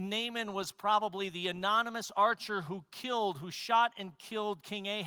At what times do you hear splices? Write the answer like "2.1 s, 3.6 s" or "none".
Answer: none